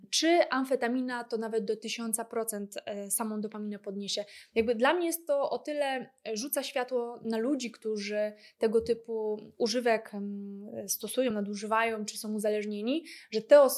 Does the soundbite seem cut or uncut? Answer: uncut